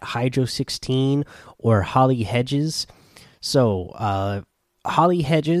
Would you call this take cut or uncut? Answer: uncut